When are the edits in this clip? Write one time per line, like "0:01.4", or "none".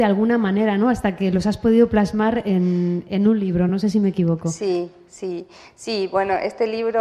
none